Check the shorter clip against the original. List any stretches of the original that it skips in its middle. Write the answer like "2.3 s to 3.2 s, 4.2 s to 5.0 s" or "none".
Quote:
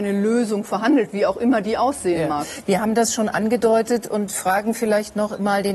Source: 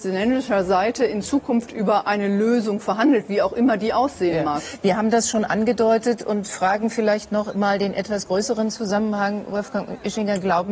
none